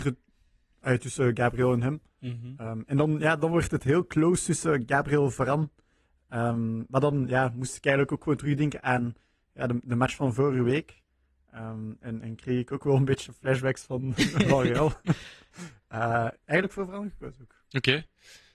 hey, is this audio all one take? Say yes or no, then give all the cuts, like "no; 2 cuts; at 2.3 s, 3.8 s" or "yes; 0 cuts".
no; 1 cut; at 16.3 s